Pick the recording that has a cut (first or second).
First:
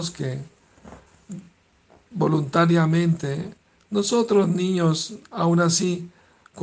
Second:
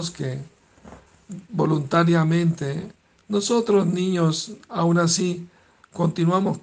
second